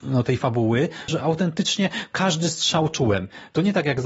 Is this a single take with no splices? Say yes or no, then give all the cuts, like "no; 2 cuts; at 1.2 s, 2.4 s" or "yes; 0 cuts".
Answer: no; 1 cut; at 1.1 s